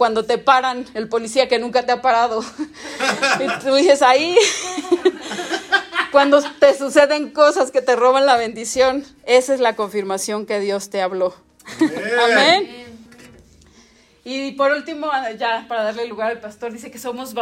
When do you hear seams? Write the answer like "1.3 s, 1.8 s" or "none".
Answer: none